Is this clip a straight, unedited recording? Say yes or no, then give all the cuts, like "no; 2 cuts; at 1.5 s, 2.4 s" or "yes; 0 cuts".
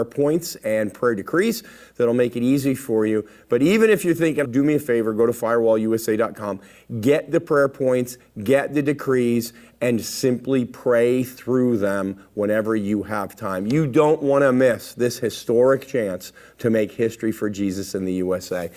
no; 1 cut; at 4.4 s